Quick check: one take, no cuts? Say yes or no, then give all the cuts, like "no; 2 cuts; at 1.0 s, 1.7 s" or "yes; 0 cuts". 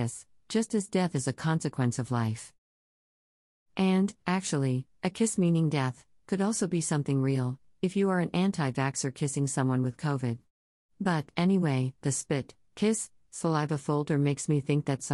yes; 0 cuts